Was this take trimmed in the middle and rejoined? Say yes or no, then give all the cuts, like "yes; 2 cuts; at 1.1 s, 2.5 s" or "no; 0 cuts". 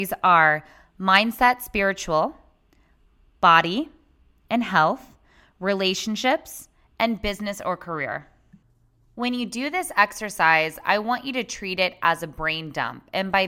no; 0 cuts